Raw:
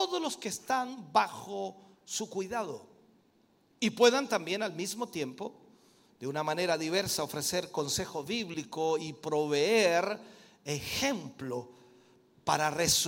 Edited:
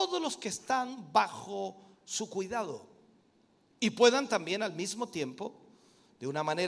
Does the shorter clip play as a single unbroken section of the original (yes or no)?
yes